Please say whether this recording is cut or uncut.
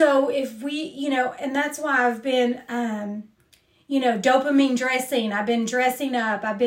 uncut